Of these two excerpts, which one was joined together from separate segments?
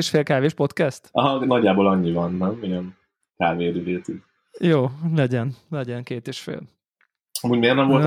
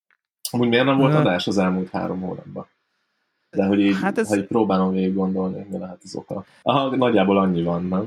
second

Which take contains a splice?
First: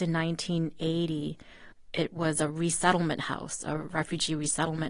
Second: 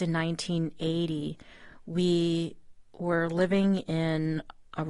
first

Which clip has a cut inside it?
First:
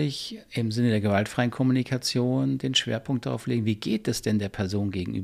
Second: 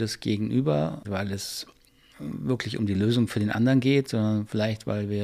second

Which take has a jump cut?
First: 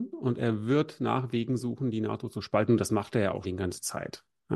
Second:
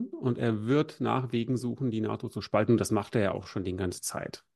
first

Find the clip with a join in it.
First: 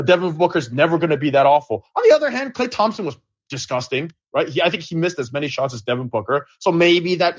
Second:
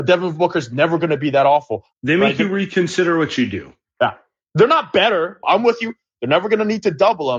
second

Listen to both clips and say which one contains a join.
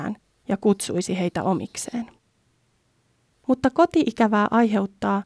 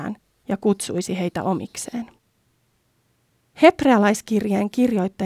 first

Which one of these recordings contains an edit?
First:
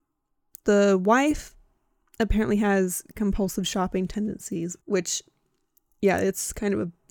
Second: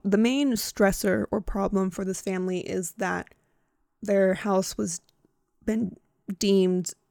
first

